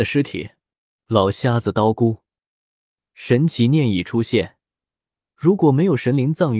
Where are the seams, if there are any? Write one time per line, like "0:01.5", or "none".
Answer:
0:01.0